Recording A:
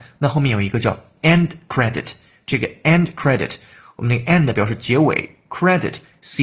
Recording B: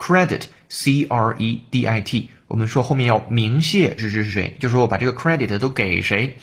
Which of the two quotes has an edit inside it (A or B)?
B